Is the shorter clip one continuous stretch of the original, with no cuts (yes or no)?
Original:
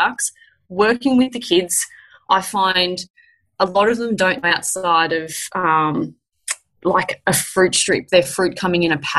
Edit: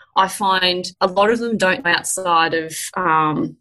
no